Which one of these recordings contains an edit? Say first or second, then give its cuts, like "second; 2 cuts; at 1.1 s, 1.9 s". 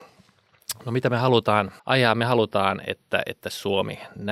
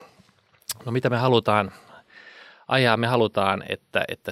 first; 1 cut; at 1.8 s